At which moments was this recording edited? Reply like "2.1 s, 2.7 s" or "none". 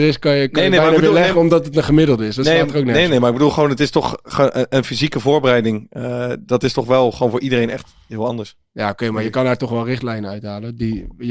none